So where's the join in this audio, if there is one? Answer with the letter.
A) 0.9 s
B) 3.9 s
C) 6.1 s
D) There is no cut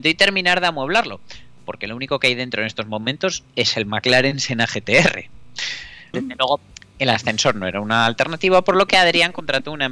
C